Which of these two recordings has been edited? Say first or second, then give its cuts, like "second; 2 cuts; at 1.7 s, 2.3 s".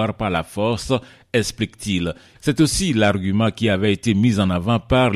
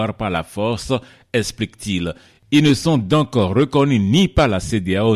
first; 1 cut; at 2.3 s